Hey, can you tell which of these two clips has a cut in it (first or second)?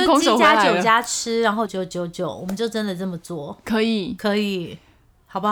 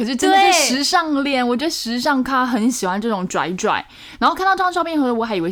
first